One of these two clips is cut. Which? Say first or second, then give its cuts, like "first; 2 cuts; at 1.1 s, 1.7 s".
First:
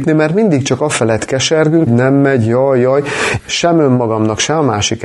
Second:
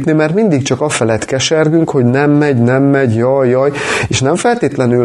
first; 2 cuts; at 1.9 s, 3.4 s